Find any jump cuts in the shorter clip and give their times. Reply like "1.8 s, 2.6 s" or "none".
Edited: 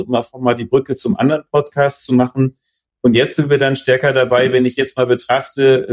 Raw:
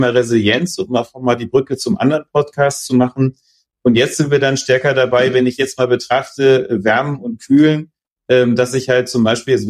none